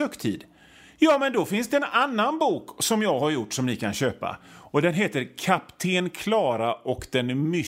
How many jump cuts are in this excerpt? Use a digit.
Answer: 0